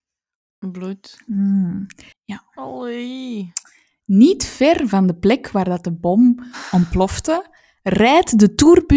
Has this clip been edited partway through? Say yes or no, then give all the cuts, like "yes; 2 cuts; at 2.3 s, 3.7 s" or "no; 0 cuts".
yes; 1 cut; at 2.1 s